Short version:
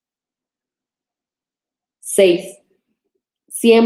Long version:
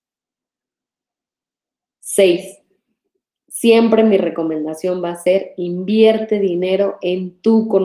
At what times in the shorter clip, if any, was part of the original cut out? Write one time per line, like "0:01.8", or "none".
none